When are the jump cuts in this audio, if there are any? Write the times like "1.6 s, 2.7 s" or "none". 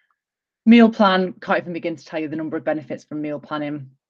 none

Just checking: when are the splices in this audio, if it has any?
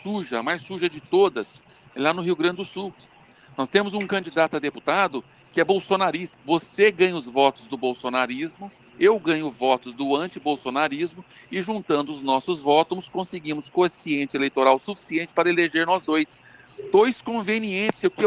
6.3 s

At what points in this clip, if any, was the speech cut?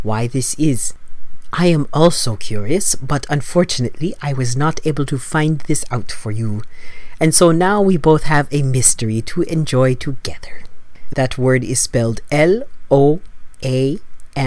11.1 s

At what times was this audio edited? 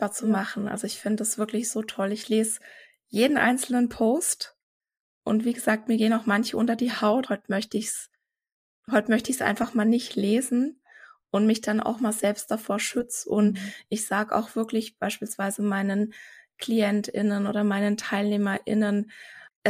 7.3 s

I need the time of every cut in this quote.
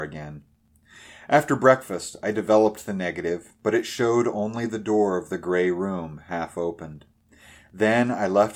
none

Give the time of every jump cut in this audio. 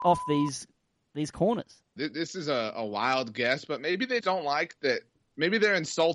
2.0 s, 4.2 s

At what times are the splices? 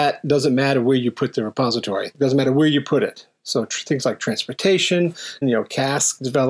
2.1 s, 5.4 s

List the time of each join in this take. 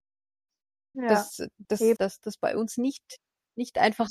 0.9 s, 2.0 s

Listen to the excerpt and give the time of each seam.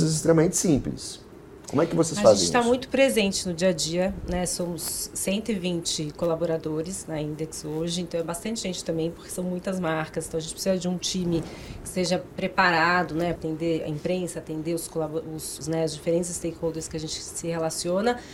13.4 s, 15.6 s

